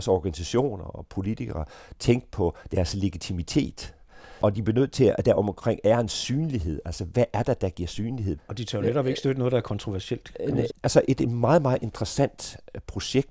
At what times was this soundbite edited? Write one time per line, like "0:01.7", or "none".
0:08.4
0:10.7